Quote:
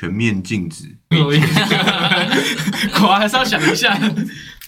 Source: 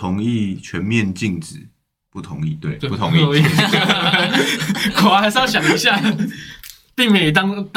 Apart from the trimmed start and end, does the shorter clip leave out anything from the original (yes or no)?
yes